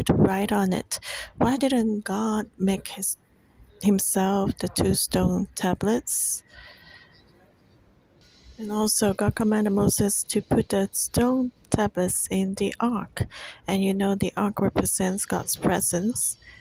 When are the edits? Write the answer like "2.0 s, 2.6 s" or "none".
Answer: none